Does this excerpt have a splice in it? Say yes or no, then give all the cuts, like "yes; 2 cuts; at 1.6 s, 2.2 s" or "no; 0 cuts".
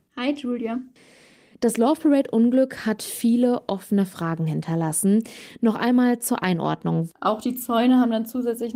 yes; 1 cut; at 7.1 s